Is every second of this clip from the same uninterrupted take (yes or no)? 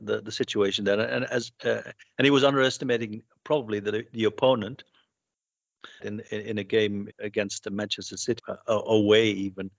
no